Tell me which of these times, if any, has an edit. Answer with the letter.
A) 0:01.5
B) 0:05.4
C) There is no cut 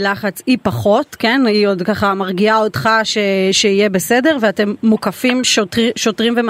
C